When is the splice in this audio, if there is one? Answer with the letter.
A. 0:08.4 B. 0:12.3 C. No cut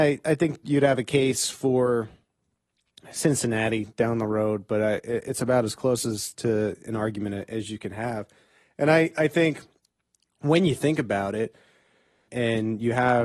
B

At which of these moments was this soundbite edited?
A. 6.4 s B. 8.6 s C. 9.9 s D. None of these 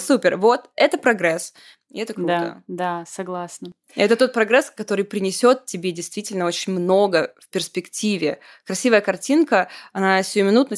D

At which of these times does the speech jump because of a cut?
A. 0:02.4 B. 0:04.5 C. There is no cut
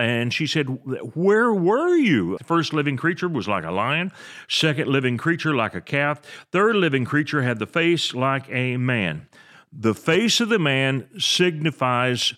A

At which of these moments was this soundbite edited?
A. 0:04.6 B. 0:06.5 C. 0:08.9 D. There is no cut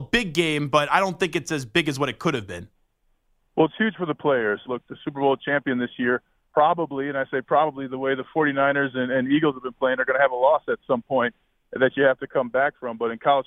A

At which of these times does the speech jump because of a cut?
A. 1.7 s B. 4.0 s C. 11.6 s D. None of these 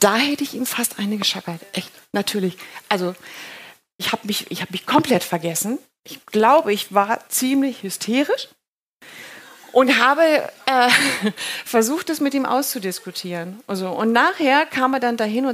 B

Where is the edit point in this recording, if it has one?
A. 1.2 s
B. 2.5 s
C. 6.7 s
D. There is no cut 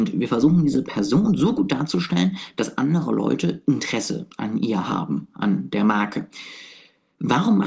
D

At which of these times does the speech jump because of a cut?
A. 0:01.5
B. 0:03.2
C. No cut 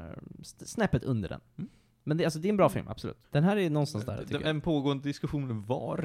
B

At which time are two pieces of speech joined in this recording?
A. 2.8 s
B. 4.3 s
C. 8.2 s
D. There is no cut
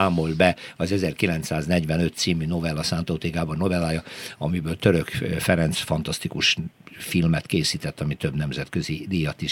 D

